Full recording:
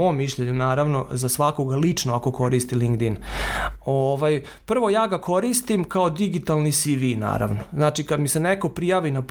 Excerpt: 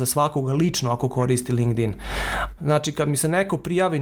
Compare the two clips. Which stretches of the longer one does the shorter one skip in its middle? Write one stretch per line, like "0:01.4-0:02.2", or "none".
0:03.8-0:07.7